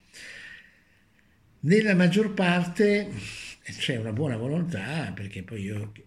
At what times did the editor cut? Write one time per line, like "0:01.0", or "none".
0:03.6